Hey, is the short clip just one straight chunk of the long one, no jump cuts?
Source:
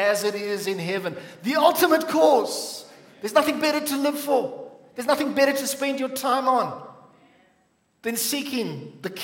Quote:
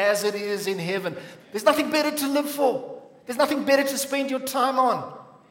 no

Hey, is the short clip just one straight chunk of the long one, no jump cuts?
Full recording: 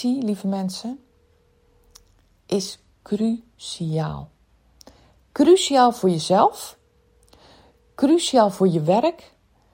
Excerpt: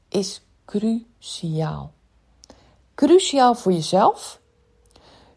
yes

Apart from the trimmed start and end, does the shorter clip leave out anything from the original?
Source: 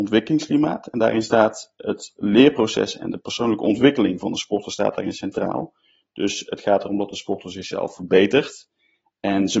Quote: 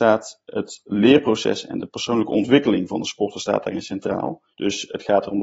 yes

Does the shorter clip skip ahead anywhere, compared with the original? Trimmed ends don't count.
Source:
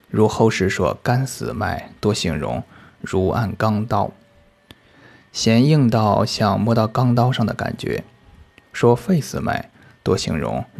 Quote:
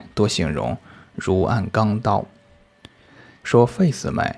yes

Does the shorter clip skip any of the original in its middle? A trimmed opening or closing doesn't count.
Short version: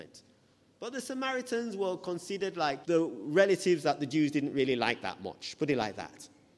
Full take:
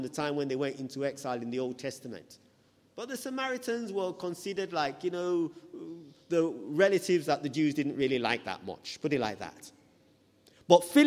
yes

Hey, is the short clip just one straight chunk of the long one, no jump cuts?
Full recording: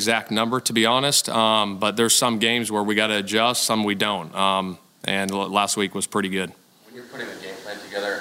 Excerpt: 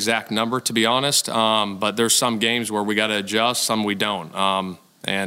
yes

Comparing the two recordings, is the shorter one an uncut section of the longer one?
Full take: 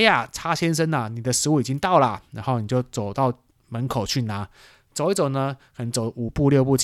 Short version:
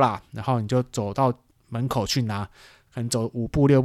no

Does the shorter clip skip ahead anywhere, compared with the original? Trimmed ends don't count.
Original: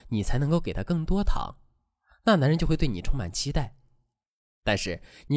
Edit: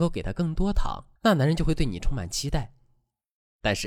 yes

